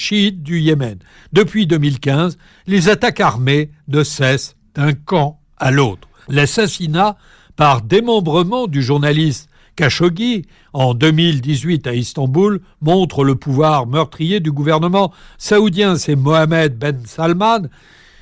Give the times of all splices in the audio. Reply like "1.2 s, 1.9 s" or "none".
6.2 s